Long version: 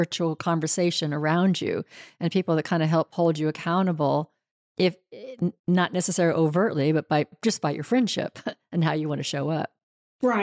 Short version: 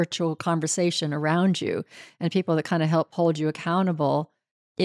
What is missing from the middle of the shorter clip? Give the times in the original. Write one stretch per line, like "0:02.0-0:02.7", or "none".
none